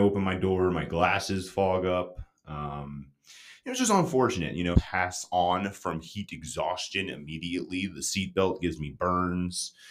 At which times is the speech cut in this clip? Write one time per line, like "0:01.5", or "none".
0:04.7